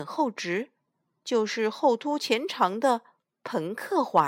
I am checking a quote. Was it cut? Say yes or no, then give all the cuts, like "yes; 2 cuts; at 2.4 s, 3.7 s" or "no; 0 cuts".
no; 0 cuts